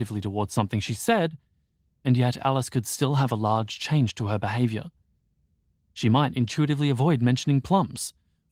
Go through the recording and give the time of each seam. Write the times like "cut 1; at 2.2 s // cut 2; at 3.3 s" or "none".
none